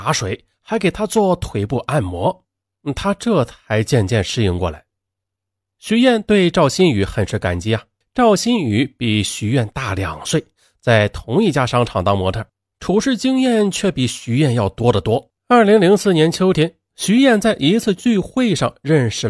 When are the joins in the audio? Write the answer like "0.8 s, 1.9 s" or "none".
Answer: 8.0 s, 15.4 s